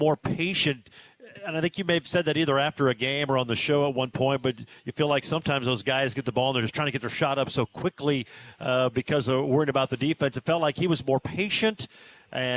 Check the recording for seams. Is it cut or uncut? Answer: uncut